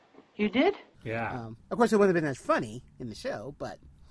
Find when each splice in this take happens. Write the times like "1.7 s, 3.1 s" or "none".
0.9 s